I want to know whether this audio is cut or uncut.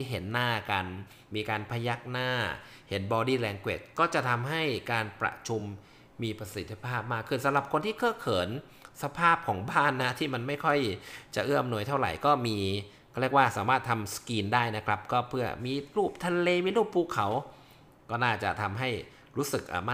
uncut